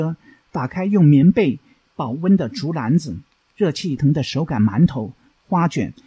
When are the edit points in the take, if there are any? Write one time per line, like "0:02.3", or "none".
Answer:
0:04.0